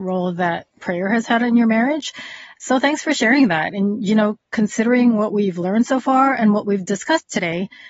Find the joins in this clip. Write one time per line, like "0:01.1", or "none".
none

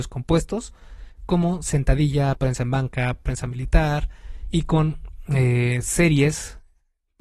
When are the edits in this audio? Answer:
0:02.4

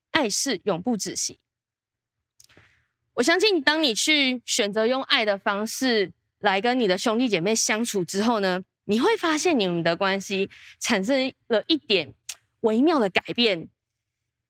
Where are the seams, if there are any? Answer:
none

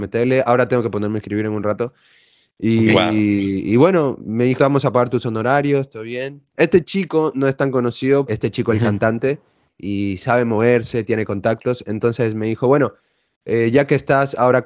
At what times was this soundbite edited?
0:04.6
0:08.3

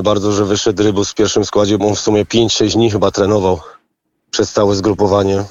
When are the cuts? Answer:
0:01.8

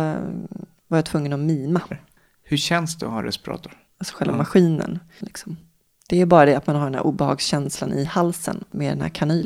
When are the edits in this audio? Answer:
0:01.9
0:03.9
0:05.2

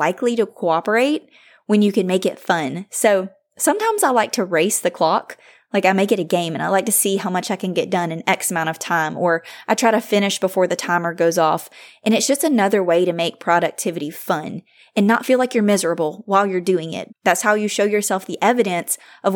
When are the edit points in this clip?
0:17.1

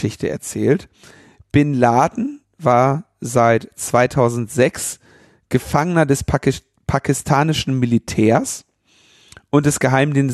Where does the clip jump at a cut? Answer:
none

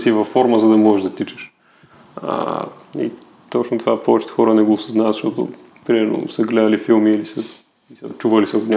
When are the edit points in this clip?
none

